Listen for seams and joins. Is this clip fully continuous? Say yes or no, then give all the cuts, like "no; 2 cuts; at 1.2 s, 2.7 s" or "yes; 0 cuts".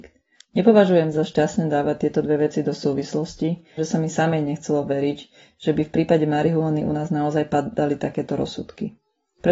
no; 1 cut; at 3.8 s